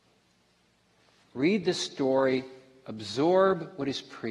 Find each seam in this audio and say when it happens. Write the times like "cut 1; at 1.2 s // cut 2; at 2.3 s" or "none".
cut 1; at 1.2 s